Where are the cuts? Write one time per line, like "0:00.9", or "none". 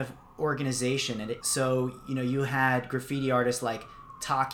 0:01.4